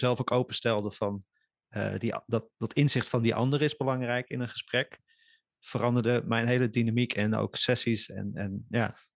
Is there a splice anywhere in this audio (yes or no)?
no